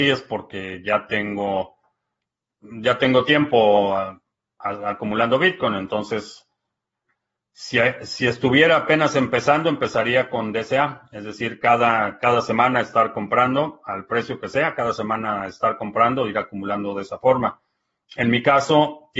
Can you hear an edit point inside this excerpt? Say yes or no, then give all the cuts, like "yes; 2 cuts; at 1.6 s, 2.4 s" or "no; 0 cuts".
no; 0 cuts